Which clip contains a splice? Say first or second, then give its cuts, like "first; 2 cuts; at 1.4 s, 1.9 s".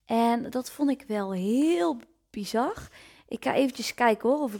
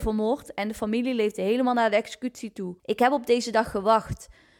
second; 1 cut; at 2.8 s